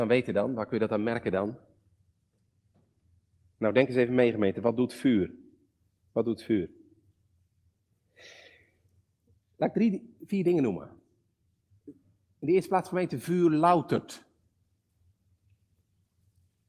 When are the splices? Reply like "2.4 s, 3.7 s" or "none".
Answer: none